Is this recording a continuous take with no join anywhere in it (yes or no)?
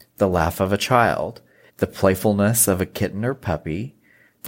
no